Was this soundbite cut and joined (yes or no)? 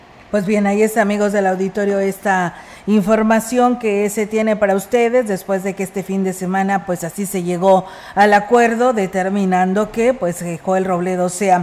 no